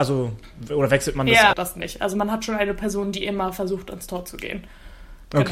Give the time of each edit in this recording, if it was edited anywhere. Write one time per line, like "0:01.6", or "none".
0:01.5